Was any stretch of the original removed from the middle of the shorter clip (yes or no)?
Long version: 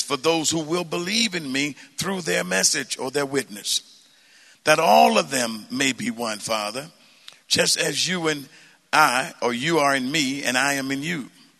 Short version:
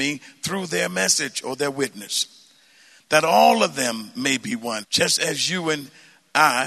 yes